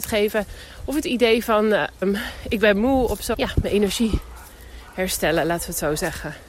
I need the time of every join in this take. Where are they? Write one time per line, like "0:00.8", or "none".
0:02.0
0:03.3